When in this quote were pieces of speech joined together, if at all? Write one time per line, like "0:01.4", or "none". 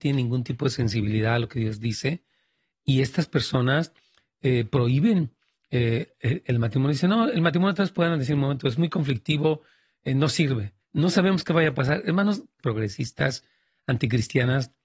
0:10.8
0:12.6

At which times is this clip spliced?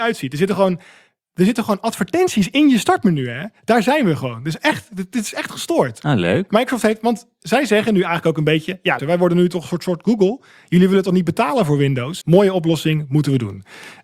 0:09.0
0:12.2

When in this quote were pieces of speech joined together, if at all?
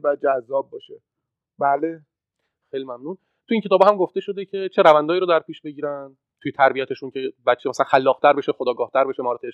none

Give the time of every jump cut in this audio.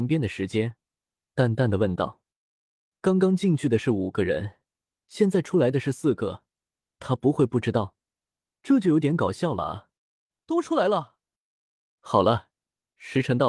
0:08.5
0:10.0
0:12.0

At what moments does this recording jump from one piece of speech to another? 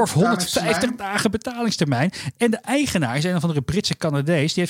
none

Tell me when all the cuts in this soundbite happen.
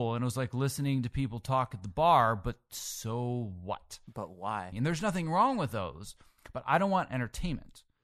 0:04.7

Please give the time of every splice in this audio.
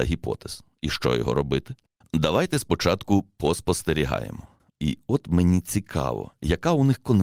0:04.7

